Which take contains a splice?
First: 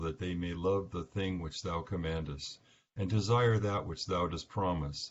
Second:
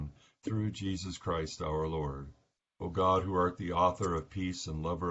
second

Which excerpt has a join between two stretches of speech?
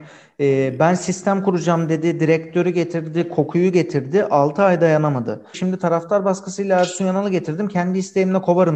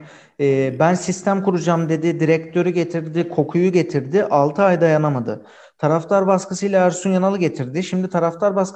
first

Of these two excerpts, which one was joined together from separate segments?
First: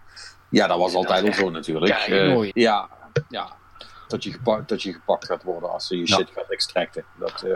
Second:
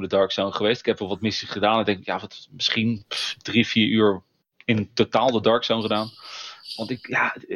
first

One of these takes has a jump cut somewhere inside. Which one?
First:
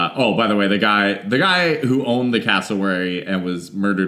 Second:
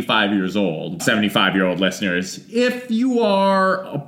second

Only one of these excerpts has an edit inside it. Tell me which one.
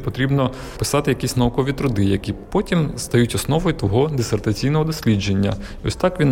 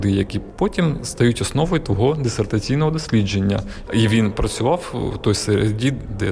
second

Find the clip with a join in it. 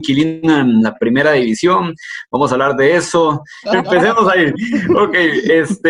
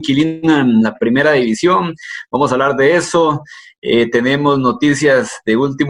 first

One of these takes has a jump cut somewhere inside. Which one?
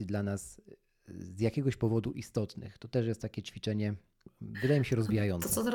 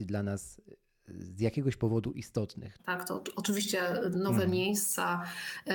second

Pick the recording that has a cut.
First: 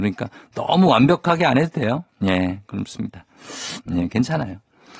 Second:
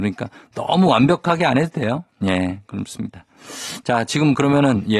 first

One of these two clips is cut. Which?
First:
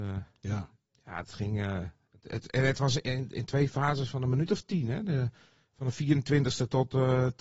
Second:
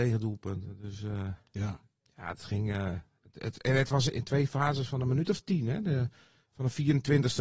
second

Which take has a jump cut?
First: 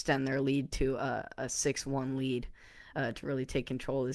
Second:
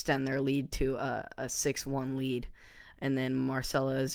second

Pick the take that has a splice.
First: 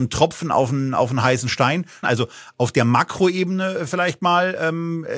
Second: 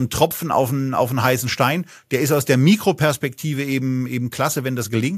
first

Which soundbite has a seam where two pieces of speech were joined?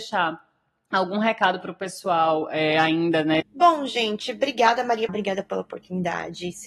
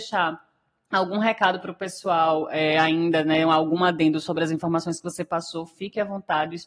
first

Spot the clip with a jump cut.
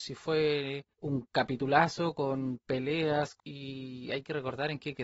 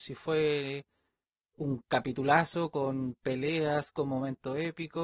first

